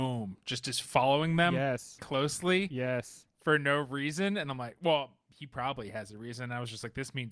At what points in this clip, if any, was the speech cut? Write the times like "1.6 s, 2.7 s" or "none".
2.0 s